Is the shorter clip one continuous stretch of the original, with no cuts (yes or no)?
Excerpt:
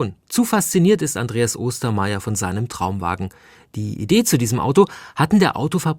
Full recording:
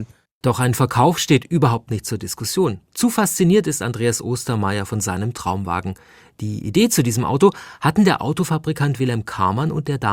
yes